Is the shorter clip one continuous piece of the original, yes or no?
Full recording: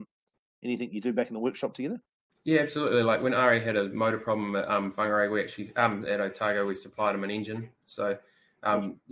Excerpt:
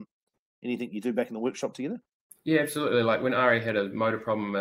yes